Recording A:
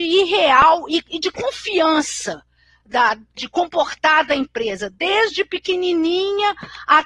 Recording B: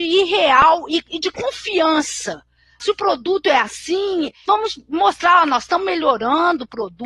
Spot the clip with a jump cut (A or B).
B